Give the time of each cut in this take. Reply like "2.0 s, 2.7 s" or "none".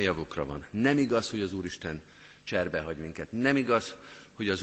none